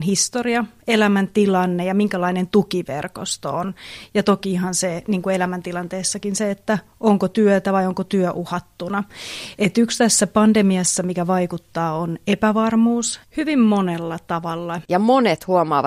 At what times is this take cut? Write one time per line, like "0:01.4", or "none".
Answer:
0:13.2
0:14.8